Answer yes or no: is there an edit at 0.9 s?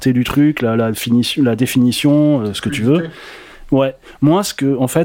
no